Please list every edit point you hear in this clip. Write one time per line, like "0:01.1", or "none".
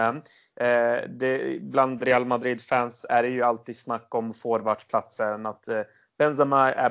none